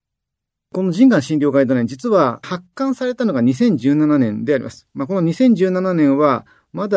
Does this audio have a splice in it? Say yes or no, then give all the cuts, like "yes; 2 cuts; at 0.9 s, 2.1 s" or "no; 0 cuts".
yes; 1 cut; at 2.4 s